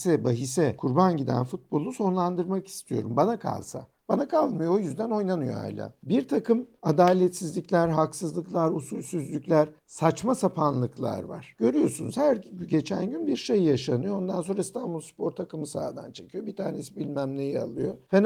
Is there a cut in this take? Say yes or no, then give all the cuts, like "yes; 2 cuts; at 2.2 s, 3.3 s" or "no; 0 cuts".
no; 0 cuts